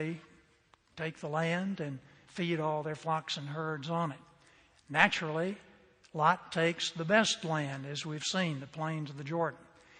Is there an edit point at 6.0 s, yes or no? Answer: no